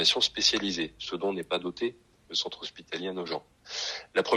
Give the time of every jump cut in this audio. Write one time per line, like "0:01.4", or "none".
none